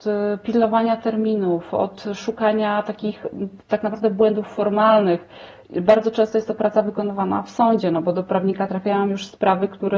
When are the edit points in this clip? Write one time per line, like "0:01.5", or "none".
none